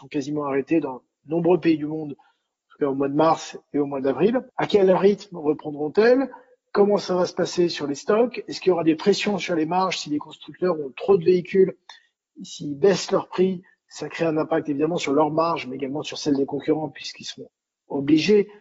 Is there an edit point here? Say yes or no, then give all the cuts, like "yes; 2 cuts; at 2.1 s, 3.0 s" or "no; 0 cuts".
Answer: yes; 1 cut; at 4.5 s